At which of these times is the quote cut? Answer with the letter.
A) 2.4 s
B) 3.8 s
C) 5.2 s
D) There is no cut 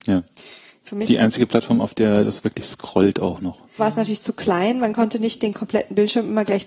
B